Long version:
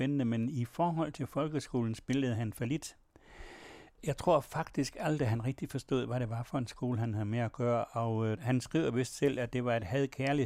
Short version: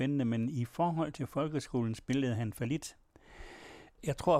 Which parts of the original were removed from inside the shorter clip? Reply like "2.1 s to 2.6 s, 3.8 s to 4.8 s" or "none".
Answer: none